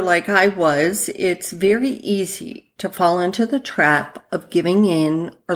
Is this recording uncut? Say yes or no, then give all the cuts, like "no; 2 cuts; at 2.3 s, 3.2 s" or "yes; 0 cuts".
yes; 0 cuts